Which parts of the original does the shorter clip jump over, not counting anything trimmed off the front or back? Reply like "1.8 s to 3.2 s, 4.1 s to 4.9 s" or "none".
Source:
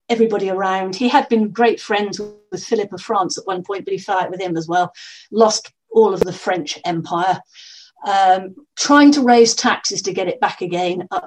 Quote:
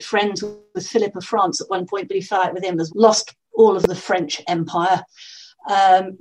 4.7 s to 5.3 s